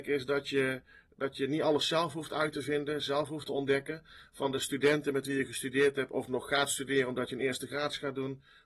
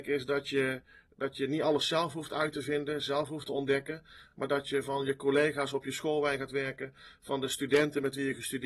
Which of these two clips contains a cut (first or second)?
first